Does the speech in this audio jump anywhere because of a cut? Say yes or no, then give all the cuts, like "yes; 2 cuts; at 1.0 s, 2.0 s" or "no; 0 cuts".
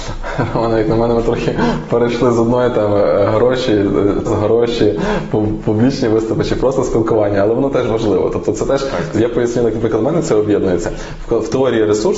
yes; 2 cuts; at 4.3 s, 9.1 s